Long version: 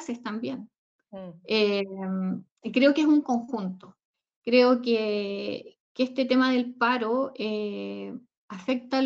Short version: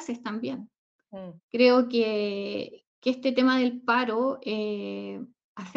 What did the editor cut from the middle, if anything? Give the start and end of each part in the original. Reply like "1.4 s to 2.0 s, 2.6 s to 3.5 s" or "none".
1.4 s to 4.3 s

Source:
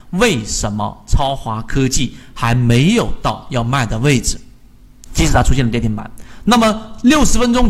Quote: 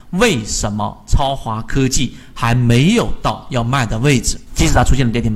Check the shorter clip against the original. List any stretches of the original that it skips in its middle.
4.5 s to 5.0 s

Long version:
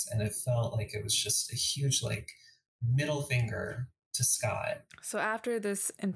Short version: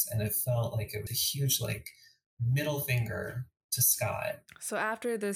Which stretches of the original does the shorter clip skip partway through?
1.1 s to 1.5 s

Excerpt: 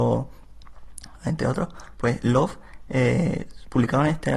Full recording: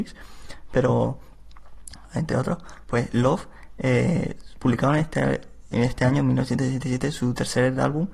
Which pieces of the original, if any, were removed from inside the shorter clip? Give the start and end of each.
none

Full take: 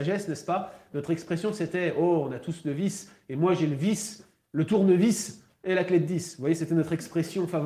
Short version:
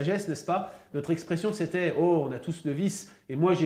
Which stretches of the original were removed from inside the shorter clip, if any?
none

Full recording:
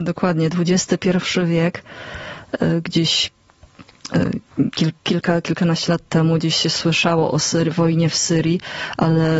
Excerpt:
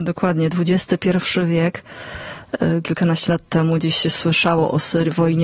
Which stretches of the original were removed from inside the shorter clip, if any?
2.8 s to 5.4 s

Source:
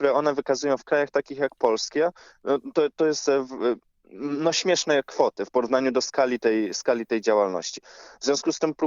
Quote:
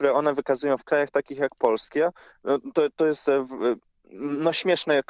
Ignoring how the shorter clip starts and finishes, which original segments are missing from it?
none

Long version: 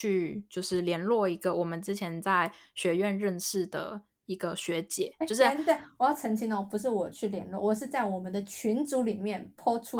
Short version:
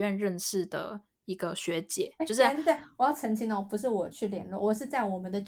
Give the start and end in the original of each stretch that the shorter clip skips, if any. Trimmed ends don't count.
none

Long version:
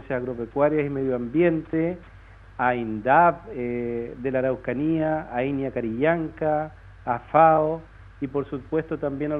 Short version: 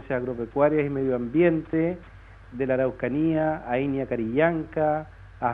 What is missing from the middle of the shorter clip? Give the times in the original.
2.5 s to 4.2 s

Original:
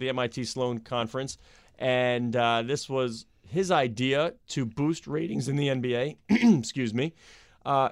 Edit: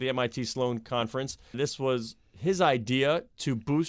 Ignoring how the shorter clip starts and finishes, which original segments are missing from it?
1.5 s to 2.6 s

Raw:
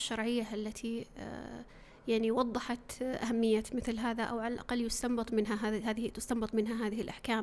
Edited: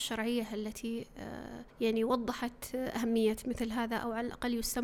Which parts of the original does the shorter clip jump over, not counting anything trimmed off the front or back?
1.7 s to 2.0 s

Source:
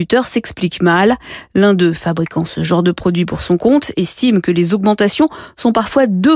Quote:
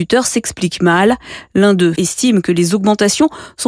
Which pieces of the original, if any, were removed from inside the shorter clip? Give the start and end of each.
1.9 s to 3.9 s

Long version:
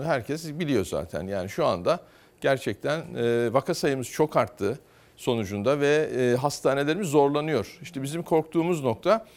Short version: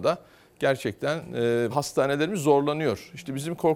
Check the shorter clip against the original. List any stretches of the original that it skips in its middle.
3.5 s to 6.4 s

